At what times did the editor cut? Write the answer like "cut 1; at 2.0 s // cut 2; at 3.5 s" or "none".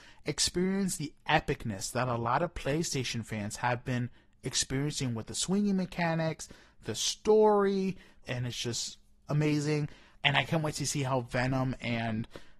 cut 1; at 8.2 s // cut 2; at 10.1 s